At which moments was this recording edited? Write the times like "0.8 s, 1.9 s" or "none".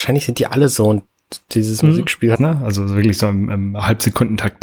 2.3 s